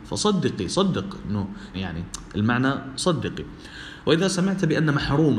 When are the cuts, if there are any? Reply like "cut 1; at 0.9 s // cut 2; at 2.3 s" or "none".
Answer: cut 1; at 1.7 s